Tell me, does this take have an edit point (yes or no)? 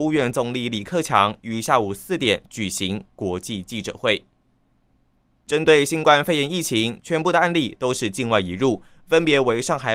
yes